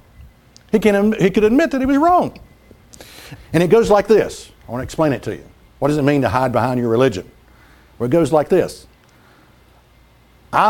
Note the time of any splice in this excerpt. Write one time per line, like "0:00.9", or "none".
0:03.4